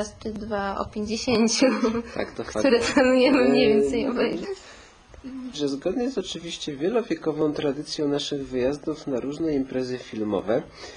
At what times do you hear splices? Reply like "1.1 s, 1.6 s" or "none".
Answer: 4.4 s, 5.5 s

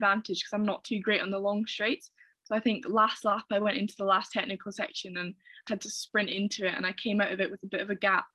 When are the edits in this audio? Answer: 5.7 s

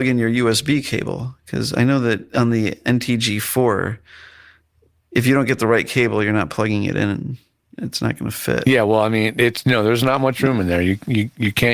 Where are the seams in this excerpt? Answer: none

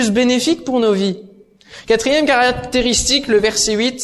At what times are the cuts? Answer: none

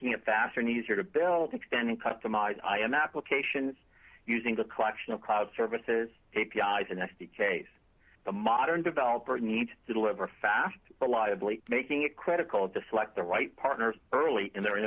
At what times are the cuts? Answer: 8.2 s, 11.6 s

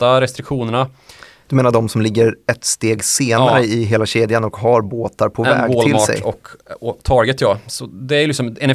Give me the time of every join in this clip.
1.4 s

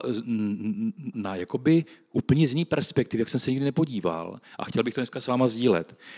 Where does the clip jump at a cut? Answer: 1.1 s

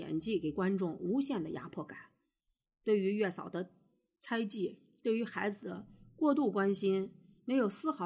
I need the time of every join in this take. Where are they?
none

